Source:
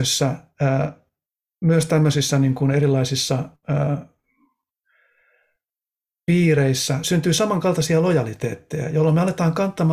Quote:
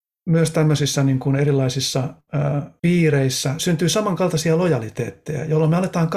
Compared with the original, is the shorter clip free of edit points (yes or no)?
no